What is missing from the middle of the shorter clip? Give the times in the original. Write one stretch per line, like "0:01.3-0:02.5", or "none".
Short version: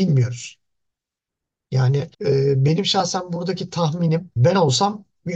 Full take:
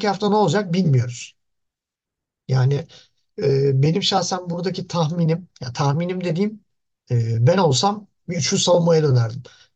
0:02.9-0:03.3
0:05.5-0:07.4

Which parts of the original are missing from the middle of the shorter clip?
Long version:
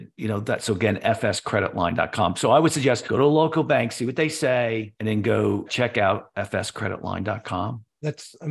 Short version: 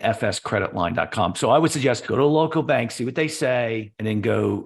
none

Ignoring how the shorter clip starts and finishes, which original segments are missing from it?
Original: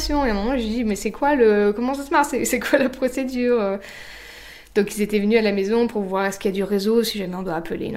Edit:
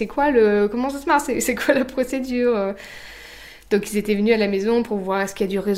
none

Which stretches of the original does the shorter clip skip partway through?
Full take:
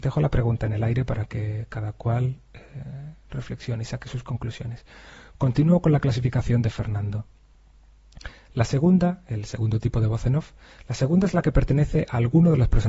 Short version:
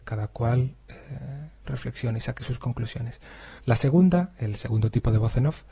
0:05.2-0:08.5

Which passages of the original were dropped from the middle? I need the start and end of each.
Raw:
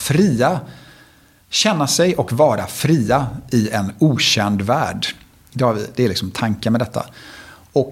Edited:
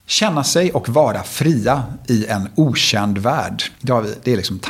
0:05.2-0:05.5

